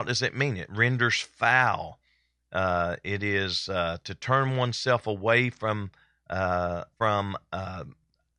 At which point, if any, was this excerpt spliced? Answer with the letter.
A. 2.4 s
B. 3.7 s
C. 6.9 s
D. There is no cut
C